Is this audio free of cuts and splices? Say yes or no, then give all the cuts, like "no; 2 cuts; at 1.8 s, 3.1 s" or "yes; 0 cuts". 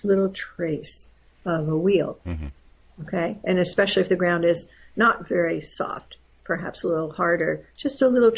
yes; 0 cuts